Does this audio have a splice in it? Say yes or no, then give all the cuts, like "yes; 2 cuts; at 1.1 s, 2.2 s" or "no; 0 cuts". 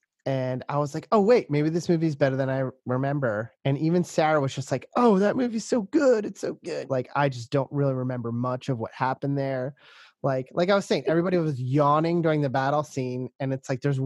yes; 1 cut; at 6.9 s